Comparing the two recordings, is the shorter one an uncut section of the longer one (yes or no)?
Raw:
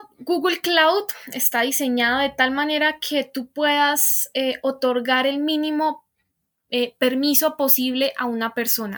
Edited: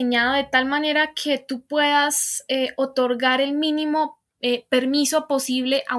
no